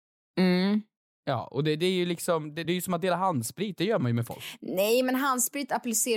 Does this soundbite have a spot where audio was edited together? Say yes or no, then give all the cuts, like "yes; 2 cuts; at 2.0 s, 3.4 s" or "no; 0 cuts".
yes; 1 cut; at 2.6 s